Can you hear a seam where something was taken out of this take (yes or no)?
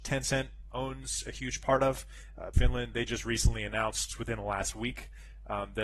yes